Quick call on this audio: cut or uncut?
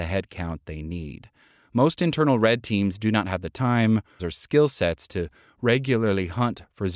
cut